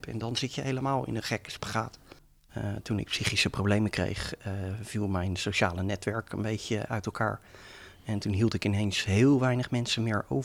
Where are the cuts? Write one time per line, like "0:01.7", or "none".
0:02.5